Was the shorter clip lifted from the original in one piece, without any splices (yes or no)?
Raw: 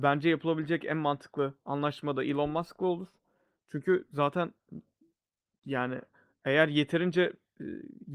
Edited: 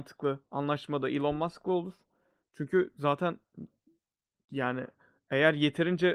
yes